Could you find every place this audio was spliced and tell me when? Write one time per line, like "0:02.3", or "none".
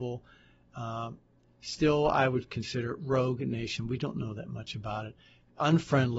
none

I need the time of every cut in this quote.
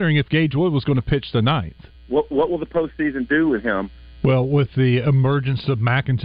0:01.9
0:04.2

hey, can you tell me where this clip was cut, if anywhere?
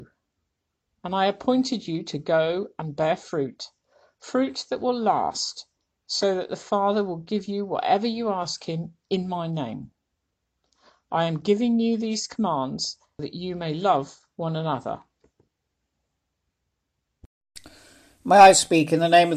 0:13.2

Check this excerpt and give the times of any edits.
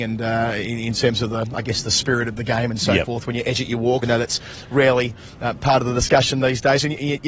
0:04.0

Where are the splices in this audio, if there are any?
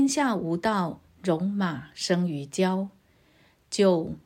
none

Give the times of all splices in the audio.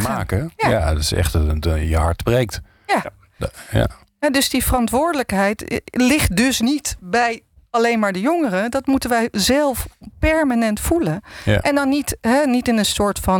none

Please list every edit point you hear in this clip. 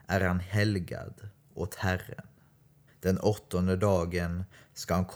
0:02.9

